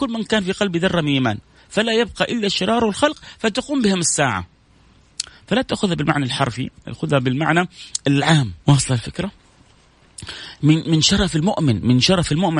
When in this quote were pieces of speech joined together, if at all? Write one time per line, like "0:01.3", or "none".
0:08.6